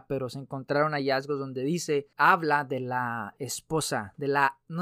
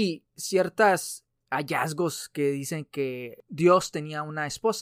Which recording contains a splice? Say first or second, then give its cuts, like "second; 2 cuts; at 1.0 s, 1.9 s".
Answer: first; 1 cut; at 2.1 s